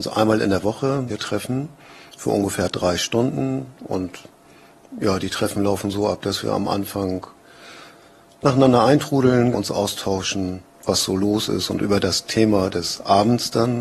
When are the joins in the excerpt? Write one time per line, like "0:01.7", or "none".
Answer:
0:01.1
0:09.5
0:10.7